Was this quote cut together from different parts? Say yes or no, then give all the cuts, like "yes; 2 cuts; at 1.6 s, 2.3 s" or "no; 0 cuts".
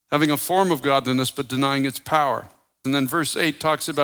yes; 1 cut; at 2.8 s